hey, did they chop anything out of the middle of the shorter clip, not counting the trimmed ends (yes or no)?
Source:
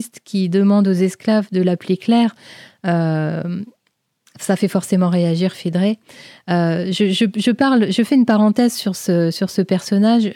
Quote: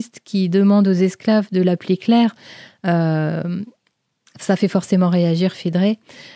no